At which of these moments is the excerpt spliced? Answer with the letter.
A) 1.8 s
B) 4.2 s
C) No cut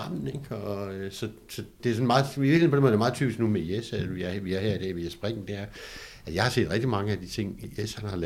A